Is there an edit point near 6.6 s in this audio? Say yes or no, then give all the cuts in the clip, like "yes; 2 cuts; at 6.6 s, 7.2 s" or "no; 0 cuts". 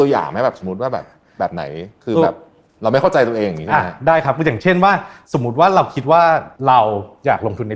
yes; 1 cut; at 6.6 s